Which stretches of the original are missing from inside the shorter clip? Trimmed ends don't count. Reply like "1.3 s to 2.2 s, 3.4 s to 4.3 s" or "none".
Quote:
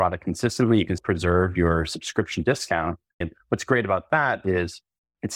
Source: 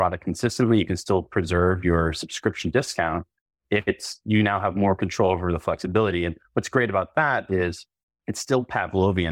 1.0 s to 1.3 s, 3.5 s to 6.2 s